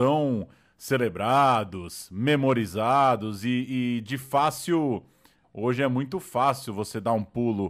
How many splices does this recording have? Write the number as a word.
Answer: one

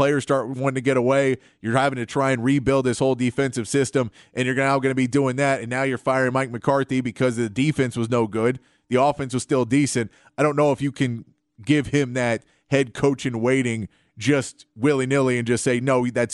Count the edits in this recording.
zero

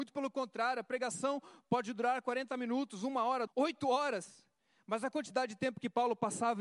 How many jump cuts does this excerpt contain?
one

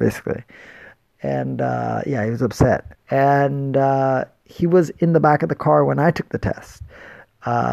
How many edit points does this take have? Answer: one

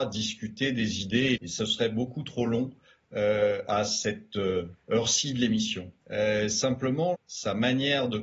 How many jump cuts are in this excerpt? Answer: three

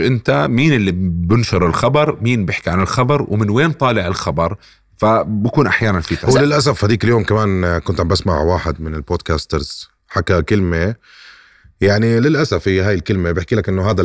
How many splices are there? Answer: zero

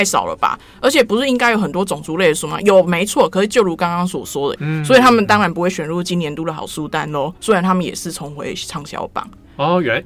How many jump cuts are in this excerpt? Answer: one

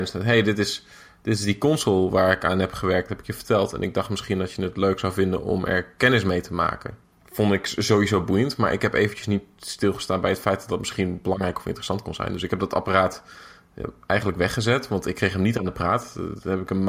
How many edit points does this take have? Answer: one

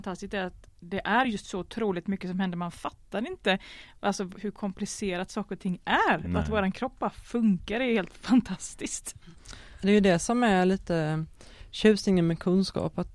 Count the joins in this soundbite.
zero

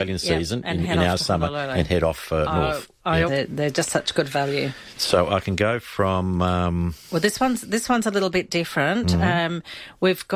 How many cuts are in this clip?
one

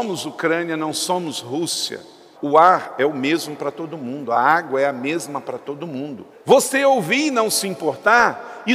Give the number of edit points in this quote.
two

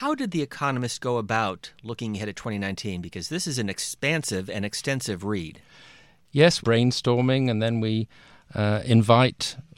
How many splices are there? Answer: one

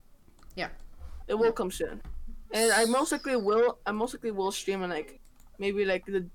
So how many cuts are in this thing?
two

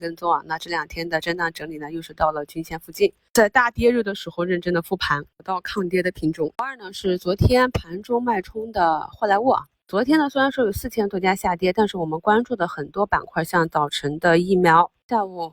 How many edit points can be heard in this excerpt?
one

